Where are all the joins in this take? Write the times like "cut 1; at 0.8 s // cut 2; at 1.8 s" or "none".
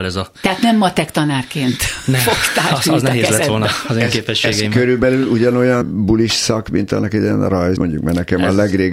cut 1; at 5.8 s // cut 2; at 7.8 s